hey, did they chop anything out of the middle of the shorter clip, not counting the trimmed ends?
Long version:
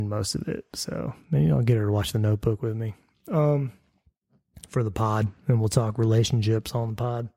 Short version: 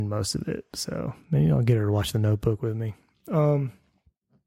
no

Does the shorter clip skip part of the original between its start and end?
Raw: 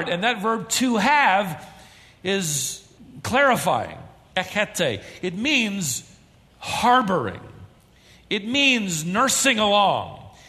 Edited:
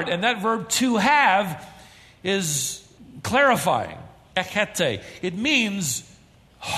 no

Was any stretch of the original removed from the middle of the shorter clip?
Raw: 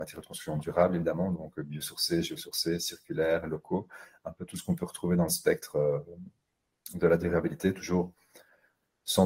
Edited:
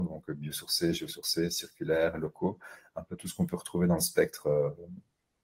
no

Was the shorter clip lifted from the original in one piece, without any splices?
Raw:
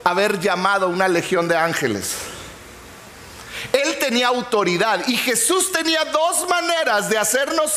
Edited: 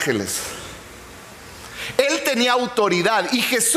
yes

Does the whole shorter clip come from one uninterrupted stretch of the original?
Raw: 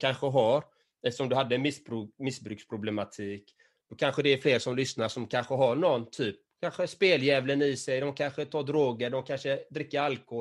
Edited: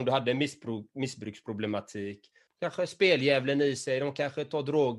no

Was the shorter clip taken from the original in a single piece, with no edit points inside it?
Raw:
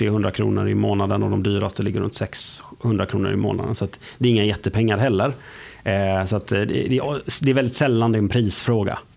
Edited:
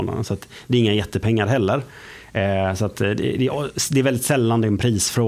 yes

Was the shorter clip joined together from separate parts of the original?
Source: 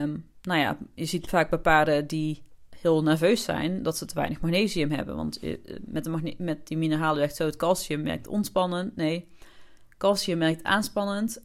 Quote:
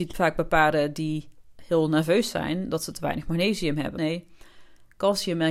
yes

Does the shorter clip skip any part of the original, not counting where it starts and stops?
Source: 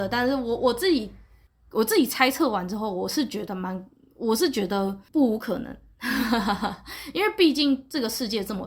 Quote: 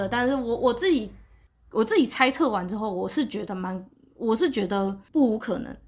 no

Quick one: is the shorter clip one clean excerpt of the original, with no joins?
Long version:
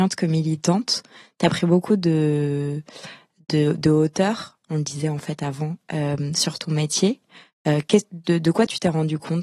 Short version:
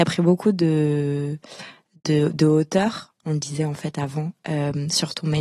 yes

